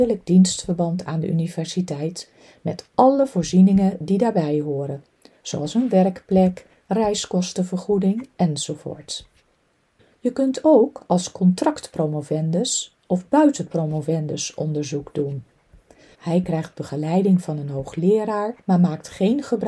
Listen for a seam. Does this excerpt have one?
yes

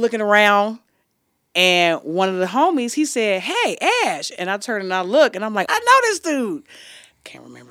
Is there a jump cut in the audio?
yes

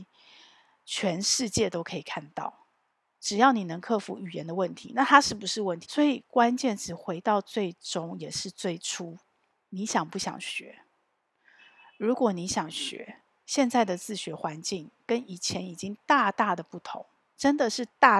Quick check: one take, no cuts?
no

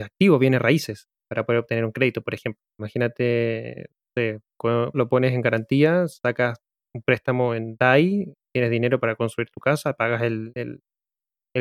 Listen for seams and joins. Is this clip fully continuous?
no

